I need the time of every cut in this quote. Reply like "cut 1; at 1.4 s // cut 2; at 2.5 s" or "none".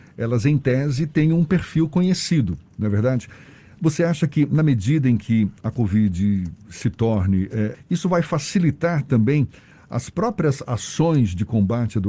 cut 1; at 7.7 s